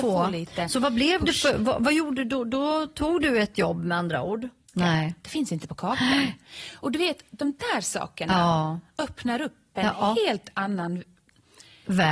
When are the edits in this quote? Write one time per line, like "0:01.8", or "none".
0:04.7